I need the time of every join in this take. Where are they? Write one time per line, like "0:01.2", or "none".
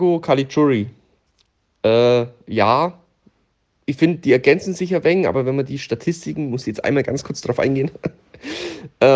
none